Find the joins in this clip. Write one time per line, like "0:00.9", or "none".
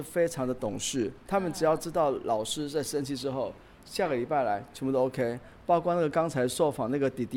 none

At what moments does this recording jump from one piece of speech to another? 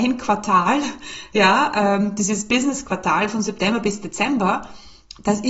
none

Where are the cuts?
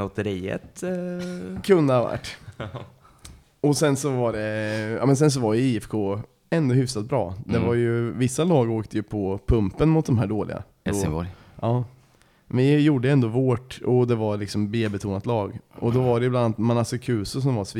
0:10.9

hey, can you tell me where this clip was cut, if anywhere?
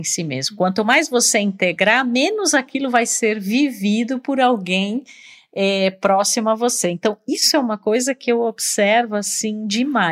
none

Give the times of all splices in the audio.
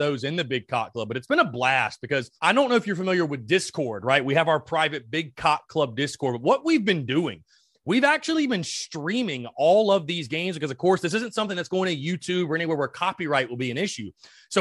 0:02.4

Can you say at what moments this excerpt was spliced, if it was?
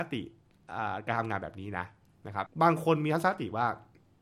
0:02.5

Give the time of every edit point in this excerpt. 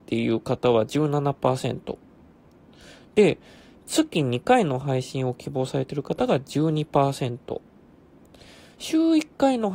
none

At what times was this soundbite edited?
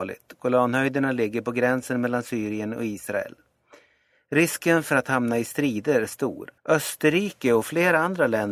0:06.6

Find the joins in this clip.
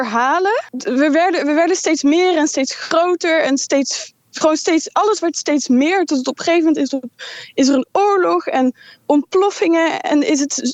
none

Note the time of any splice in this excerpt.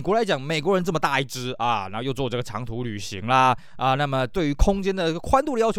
none

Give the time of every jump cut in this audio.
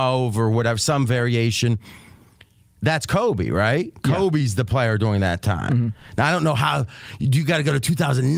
none

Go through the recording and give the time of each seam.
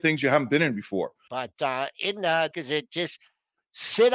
0:01.3
0:02.5

